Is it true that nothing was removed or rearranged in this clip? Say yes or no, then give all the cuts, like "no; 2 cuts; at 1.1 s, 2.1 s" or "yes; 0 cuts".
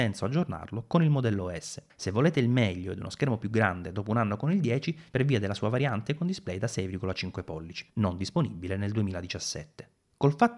no; 2 cuts; at 1.9 s, 5.1 s